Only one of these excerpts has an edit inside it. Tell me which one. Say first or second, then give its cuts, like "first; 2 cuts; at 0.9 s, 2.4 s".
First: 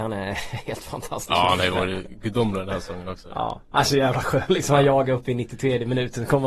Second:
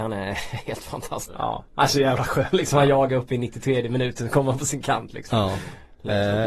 second; 1 cut; at 1.3 s